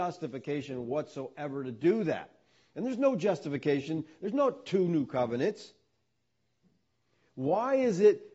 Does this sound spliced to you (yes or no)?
no